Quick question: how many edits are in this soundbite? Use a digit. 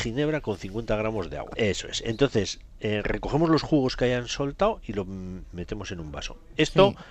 1